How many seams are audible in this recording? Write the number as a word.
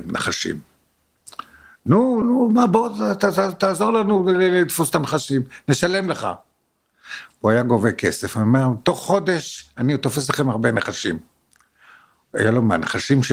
one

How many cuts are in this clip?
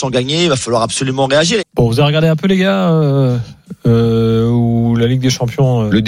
one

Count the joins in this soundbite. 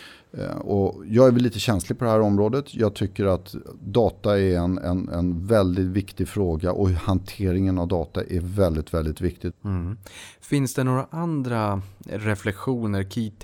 one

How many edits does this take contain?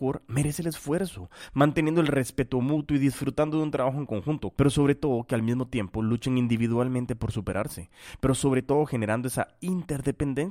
one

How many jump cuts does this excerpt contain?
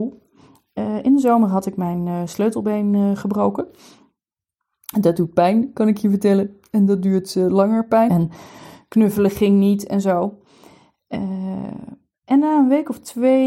one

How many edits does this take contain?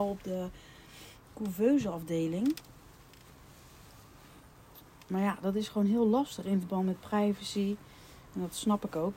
zero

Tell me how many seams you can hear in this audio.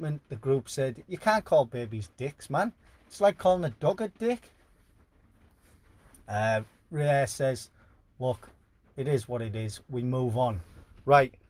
zero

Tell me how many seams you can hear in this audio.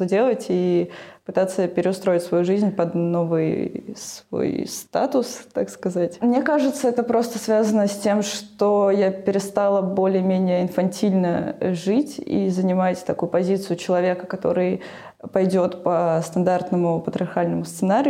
one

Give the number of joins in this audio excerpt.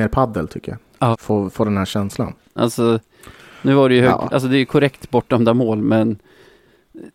two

